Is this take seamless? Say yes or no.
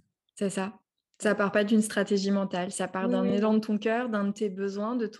yes